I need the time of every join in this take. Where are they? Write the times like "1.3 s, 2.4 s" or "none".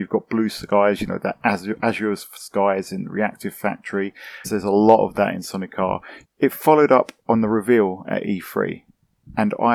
4.4 s, 6.2 s